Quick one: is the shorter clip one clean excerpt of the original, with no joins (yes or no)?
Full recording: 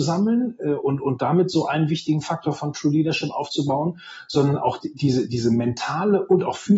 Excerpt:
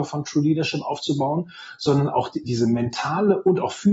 no